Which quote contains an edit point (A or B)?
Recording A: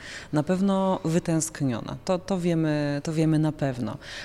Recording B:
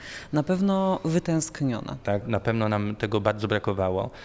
B